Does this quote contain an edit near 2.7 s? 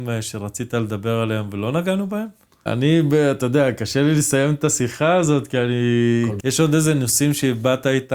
yes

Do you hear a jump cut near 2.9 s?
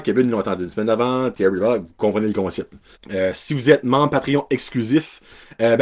yes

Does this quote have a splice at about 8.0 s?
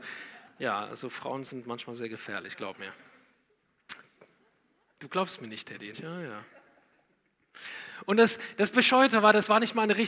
no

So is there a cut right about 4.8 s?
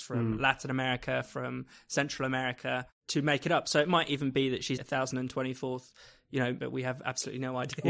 yes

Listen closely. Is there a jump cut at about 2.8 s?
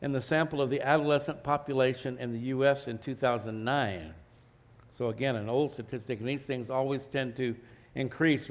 no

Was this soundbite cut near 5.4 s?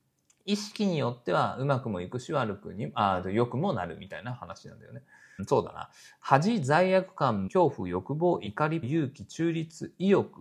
yes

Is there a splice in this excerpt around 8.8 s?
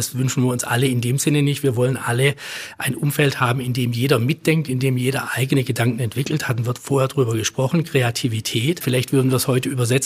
yes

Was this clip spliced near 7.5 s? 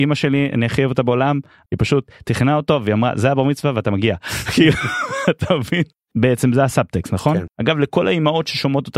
yes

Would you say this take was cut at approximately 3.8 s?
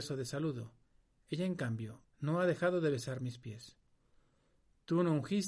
no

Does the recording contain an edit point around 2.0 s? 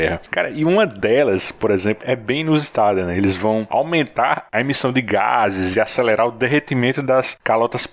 yes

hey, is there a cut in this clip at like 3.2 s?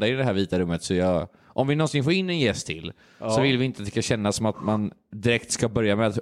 no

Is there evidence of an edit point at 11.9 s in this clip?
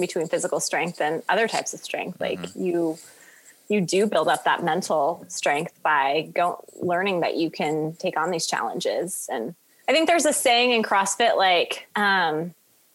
yes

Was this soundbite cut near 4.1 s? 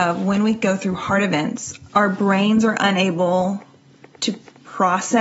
no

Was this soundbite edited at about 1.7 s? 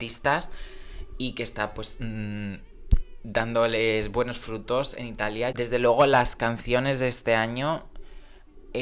no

